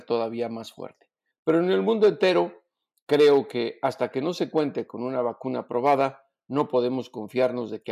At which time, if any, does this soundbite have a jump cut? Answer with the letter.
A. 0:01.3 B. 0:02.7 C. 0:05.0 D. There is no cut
A